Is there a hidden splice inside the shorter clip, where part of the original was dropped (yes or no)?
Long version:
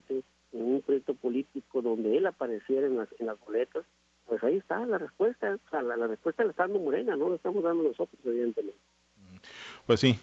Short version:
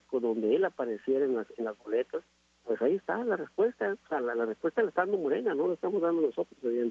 no